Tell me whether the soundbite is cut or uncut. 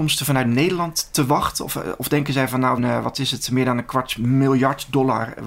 cut